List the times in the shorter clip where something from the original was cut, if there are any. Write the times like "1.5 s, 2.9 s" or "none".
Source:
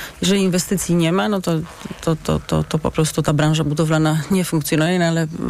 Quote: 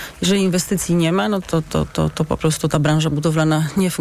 1.4 s